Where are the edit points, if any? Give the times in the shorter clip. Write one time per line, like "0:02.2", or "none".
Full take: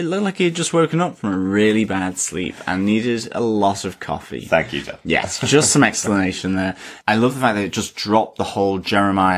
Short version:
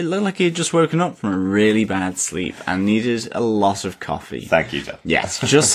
none